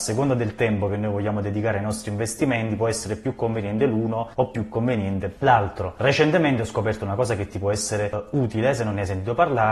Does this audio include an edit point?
no; 0 cuts

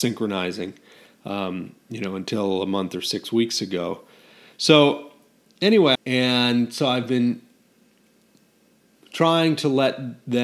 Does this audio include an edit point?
yes; 1 cut; at 5.9 s

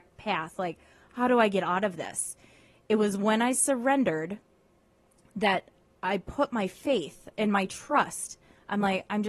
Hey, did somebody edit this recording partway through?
no; 0 cuts

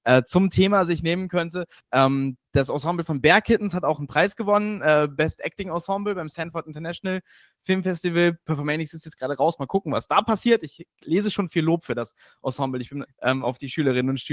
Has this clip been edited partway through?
yes; 2 cuts; at 1.8 s, 13.1 s

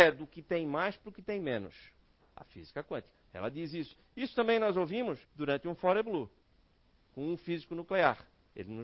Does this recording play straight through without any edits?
no; 3 cuts; at 2.2 s, 3.3 s, 5.2 s

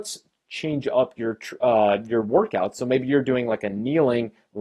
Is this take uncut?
yes; 0 cuts

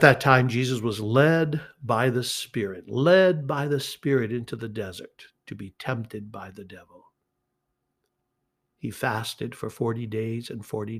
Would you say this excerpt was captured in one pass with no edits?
yes; 0 cuts

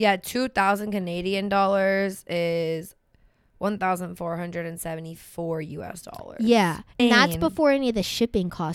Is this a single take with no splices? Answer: no; 1 cut; at 7.0 s

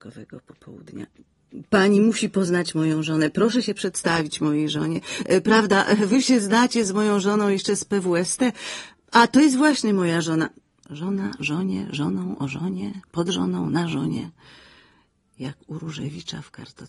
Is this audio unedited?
yes; 0 cuts

